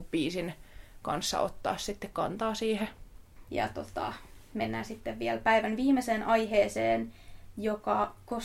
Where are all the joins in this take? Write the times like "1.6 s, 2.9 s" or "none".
3.5 s